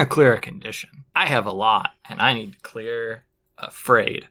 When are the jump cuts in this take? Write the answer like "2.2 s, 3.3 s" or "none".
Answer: 2.0 s